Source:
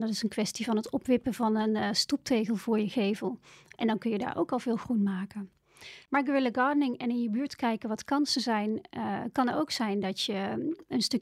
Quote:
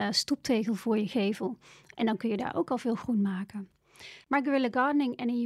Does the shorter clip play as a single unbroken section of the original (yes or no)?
yes